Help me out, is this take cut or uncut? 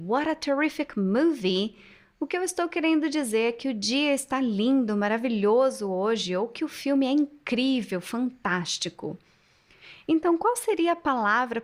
uncut